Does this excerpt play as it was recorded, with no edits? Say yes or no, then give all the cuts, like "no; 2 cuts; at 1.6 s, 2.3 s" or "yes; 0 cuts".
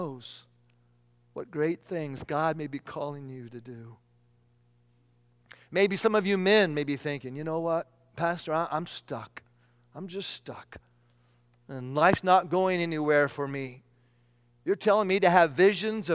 yes; 0 cuts